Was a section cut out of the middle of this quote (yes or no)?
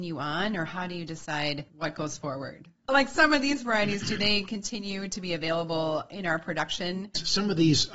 no